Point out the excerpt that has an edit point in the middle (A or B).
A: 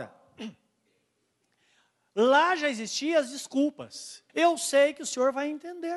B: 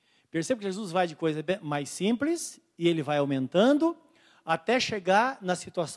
A